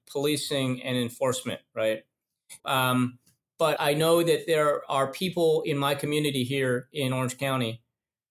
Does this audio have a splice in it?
yes; 2 cuts; at 2.6 s, 3.8 s

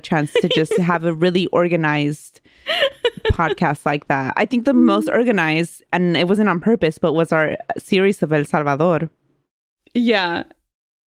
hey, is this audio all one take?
yes; 0 cuts

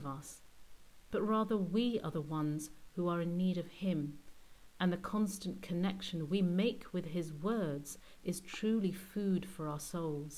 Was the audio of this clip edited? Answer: yes; 1 cut; at 8.2 s

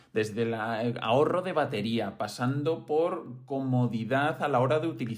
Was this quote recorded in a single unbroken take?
yes; 0 cuts

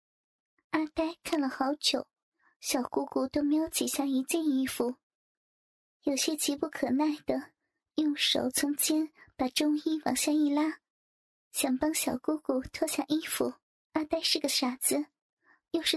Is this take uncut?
no; 1 cut; at 13.7 s

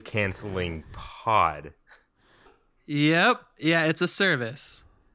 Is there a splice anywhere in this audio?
yes; 1 cut; at 2.5 s

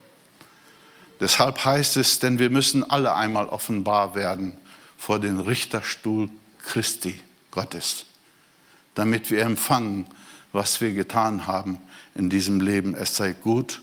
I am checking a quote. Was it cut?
no; 0 cuts

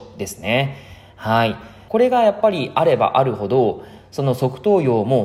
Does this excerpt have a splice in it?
yes; 1 cut; at 1.9 s

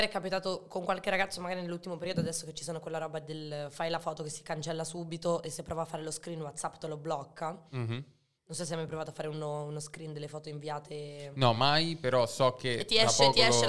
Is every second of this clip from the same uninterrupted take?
yes; 0 cuts

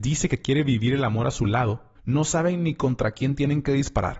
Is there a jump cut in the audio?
yes; 1 cut; at 2.0 s

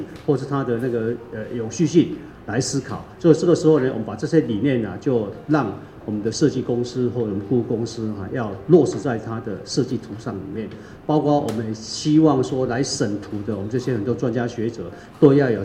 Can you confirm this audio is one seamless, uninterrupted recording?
yes; 0 cuts

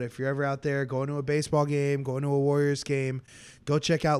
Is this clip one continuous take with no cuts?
yes; 0 cuts

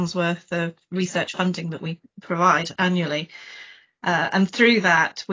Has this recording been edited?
no; 0 cuts

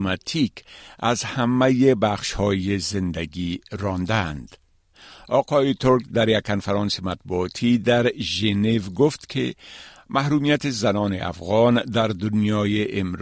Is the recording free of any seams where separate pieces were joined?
yes; 0 cuts

